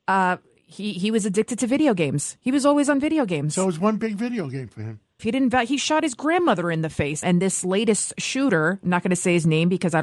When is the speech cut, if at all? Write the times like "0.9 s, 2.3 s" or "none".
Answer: 5.2 s, 7.2 s